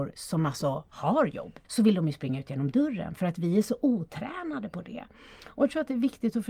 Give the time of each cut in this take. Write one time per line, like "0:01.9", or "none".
0:01.6